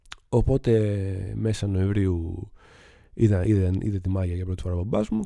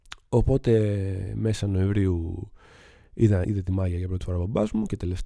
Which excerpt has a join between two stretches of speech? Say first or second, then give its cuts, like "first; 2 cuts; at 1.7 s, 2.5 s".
second; 1 cut; at 3.4 s